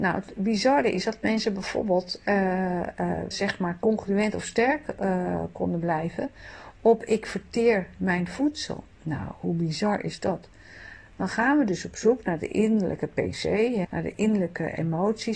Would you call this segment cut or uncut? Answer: cut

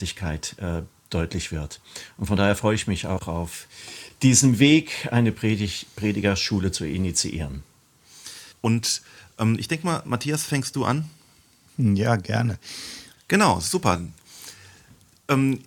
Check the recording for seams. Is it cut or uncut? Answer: cut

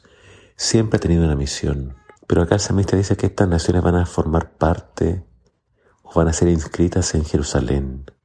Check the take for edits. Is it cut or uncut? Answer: cut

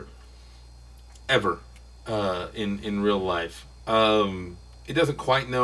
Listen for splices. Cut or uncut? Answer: cut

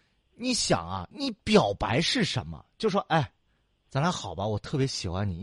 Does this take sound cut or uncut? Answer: cut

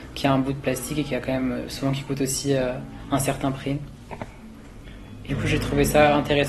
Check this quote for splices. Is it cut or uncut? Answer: cut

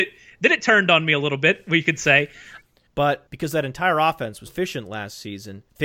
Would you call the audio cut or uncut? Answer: cut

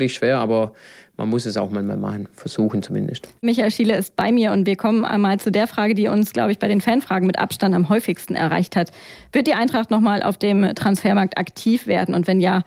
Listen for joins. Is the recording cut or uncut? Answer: uncut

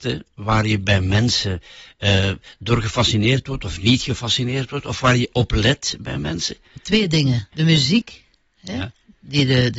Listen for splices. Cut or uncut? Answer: cut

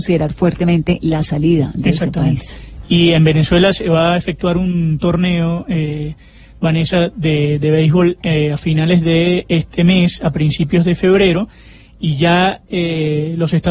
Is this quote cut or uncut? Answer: uncut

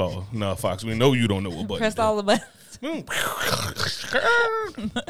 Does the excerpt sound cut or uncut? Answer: uncut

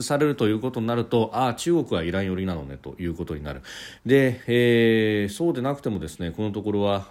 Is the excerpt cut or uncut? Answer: cut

